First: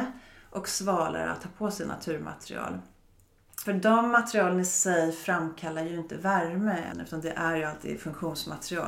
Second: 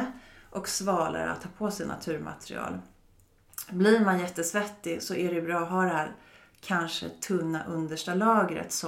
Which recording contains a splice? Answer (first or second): first